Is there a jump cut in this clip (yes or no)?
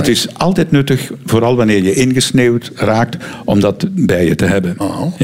no